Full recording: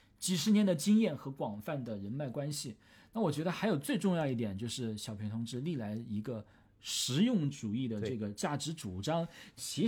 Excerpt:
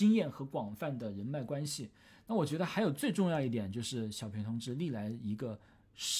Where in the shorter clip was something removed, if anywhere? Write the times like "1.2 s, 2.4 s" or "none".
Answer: none